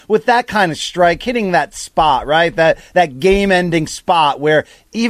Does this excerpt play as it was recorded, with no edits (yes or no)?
yes